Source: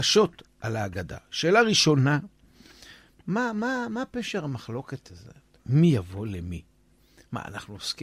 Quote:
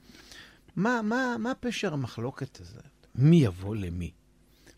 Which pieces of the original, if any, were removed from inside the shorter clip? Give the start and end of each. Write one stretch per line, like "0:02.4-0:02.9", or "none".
none